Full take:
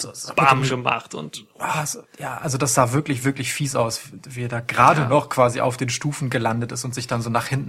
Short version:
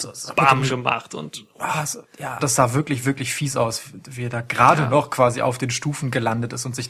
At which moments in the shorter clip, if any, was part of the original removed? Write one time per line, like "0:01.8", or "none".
0:02.4